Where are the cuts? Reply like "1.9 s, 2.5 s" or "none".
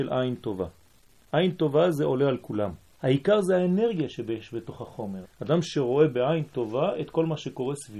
3.0 s, 5.2 s